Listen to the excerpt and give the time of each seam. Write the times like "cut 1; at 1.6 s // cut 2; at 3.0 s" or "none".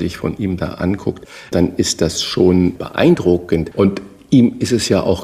none